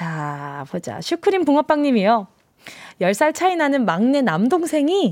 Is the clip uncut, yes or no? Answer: yes